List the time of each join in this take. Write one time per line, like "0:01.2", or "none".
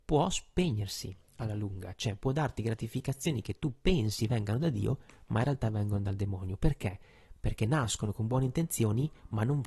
none